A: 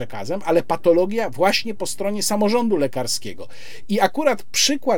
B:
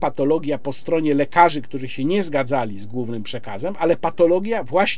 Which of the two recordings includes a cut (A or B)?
A